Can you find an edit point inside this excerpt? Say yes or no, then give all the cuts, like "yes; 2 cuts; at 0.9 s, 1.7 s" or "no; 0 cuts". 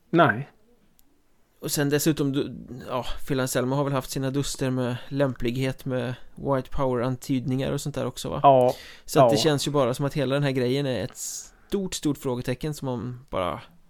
no; 0 cuts